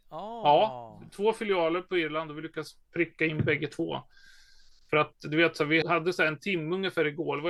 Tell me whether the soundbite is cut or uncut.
cut